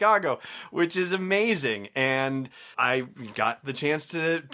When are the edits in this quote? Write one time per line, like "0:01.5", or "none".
0:02.7